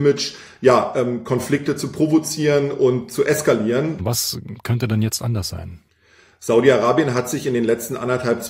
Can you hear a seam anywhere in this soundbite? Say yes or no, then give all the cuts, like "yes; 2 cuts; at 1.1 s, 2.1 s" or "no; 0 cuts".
yes; 1 cut; at 4.0 s